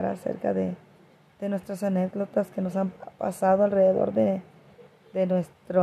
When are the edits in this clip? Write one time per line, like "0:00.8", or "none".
none